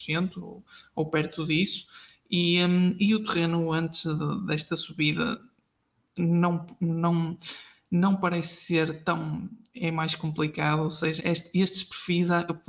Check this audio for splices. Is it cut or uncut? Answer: cut